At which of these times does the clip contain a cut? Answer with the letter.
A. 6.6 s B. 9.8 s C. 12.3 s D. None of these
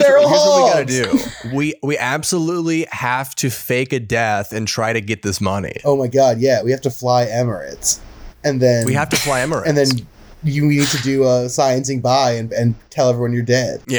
D